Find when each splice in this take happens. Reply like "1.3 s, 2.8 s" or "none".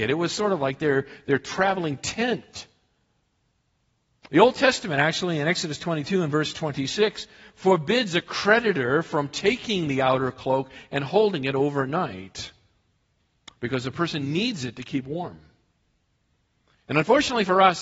16.7 s